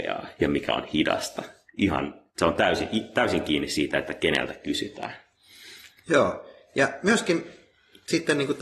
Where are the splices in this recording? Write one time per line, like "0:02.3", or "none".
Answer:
0:02.3